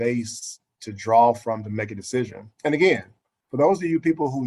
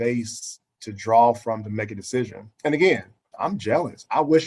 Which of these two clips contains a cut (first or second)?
second